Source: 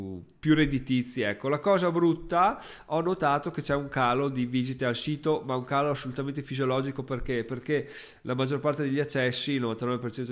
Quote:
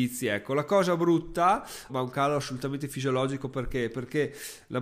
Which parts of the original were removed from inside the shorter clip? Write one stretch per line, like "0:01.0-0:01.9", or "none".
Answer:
0:02.8-0:05.4